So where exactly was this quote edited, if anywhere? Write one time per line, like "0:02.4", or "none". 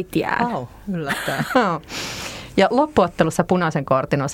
0:01.5